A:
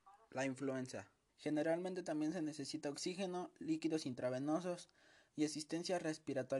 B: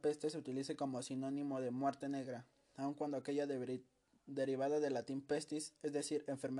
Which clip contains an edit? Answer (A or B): A